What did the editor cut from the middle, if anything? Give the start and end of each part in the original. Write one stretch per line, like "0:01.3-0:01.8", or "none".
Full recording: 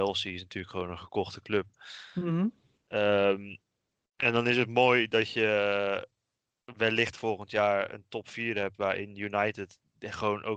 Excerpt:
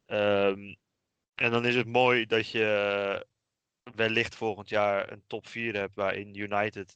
none